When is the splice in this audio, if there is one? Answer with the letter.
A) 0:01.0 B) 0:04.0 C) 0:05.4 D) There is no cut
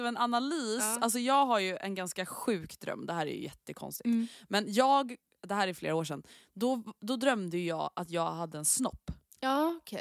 D